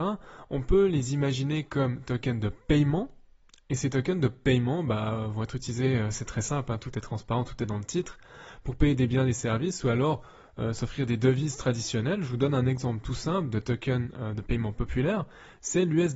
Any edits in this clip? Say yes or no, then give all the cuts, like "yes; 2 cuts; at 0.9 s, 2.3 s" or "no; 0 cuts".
no; 0 cuts